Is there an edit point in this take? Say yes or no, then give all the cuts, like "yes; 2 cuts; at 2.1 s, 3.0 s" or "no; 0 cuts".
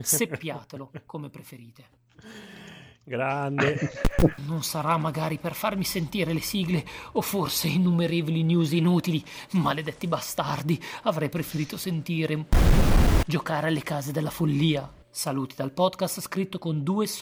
yes; 1 cut; at 4.4 s